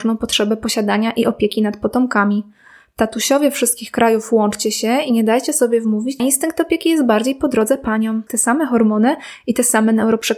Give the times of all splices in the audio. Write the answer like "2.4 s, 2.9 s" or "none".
6.2 s, 8.3 s